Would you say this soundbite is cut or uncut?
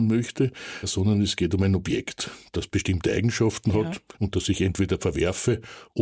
uncut